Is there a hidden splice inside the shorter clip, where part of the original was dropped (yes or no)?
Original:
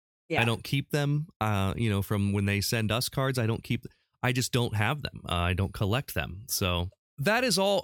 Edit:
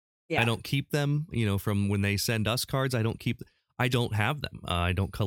yes